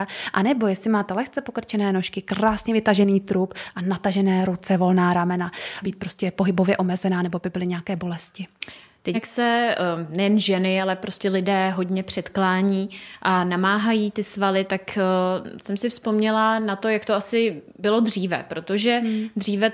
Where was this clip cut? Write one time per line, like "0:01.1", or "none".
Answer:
0:05.8
0:09.1